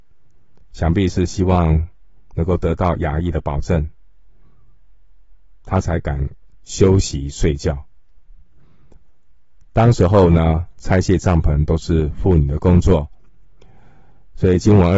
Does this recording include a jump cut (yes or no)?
yes